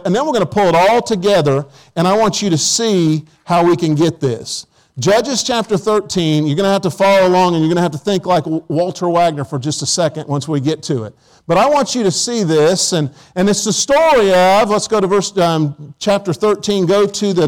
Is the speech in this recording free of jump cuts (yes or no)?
yes